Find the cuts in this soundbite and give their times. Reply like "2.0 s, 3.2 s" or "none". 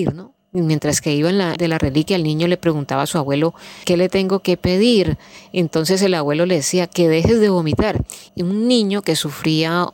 1.6 s, 6.9 s, 8.3 s